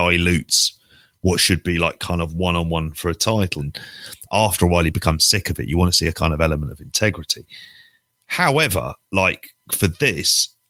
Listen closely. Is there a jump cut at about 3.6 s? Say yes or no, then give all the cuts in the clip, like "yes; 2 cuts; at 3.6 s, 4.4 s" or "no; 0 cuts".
yes; 1 cut; at 3.6 s